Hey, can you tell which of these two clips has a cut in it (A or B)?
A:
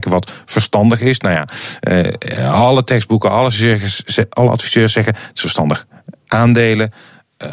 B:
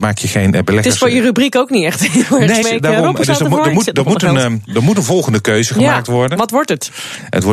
B